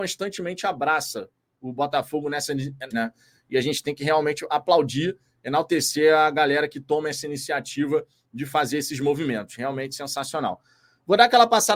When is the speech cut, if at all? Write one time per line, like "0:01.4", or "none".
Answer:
0:02.9